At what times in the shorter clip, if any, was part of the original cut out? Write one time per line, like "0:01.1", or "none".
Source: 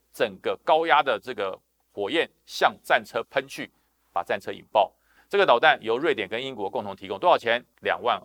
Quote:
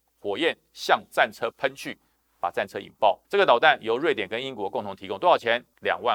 0:03.2

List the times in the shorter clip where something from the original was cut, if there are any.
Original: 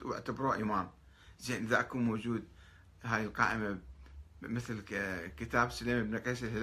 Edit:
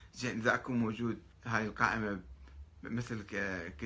0:01.3

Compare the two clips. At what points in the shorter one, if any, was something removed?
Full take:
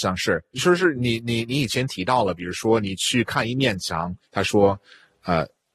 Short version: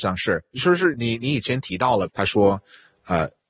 0:00.9
0:02.1

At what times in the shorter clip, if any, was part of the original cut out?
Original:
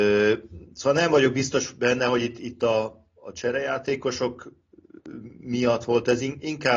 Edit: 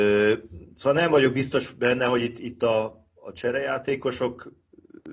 none

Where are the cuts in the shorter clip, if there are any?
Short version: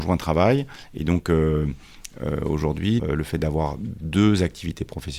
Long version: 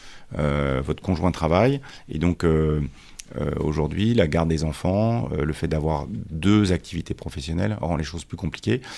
0:03.0

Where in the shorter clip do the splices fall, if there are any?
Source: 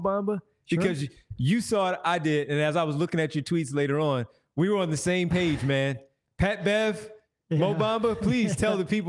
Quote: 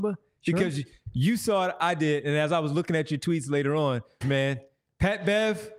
0:04.2

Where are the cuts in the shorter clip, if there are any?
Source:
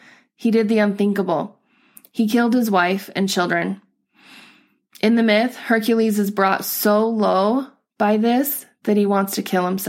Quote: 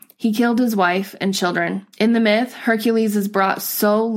0:01.9

